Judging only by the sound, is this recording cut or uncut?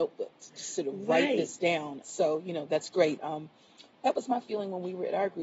cut